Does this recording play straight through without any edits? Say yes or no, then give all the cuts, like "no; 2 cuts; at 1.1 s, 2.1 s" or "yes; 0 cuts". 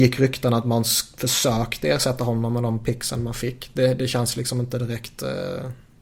yes; 0 cuts